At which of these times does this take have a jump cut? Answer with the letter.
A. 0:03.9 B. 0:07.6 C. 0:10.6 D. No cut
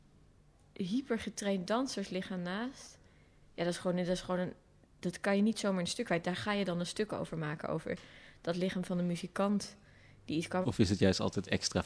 C